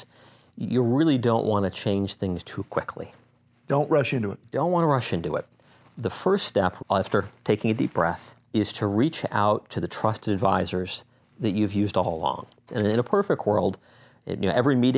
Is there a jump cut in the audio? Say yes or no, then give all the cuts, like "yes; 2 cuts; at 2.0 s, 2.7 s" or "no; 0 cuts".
yes; 3 cuts; at 6.8 s, 8.4 s, 12.7 s